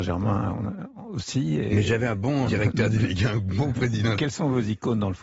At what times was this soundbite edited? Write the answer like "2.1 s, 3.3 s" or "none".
2.4 s, 4.2 s